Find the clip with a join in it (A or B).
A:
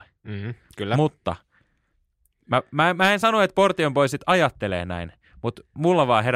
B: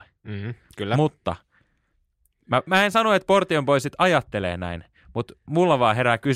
B